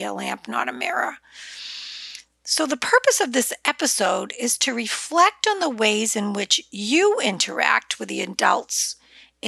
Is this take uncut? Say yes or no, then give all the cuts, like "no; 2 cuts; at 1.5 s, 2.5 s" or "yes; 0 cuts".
yes; 0 cuts